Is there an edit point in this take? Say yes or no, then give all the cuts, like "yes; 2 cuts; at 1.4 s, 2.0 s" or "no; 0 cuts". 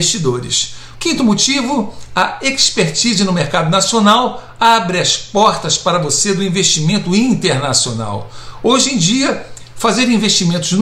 yes; 1 cut; at 0.9 s